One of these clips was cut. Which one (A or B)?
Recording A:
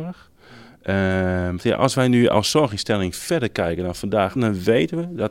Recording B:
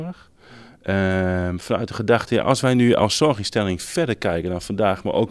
A